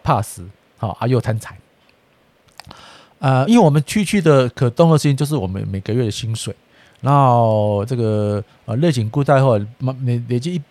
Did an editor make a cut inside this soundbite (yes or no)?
no